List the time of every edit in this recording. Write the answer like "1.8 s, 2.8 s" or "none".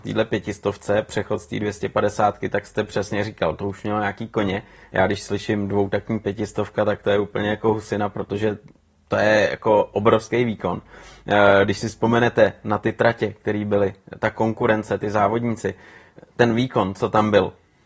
none